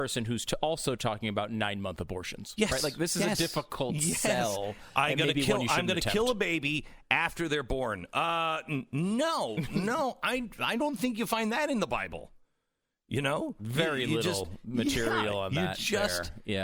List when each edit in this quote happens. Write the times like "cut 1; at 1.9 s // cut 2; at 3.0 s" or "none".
none